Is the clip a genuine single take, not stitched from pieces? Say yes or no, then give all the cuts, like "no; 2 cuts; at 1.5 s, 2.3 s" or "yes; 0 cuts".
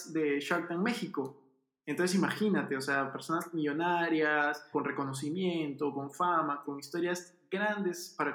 no; 2 cuts; at 4.7 s, 6.6 s